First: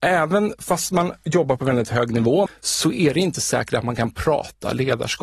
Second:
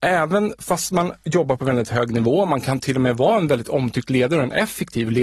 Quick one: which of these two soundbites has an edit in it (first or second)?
first